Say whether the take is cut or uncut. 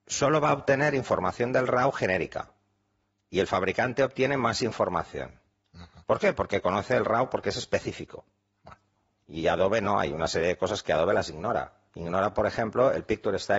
uncut